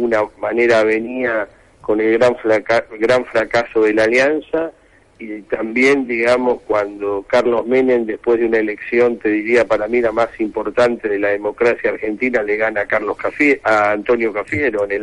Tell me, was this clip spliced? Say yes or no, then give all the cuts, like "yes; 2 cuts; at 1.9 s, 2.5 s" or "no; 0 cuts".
no; 0 cuts